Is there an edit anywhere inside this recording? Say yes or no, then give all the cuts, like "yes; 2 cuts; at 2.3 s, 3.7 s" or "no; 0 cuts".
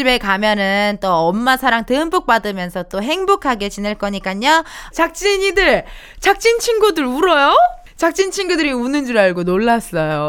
yes; 1 cut; at 4.9 s